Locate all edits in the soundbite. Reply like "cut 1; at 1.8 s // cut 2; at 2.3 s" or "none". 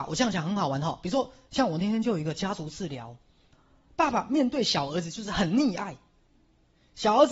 none